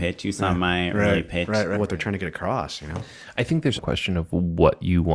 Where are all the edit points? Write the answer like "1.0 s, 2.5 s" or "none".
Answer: 1.7 s, 3.8 s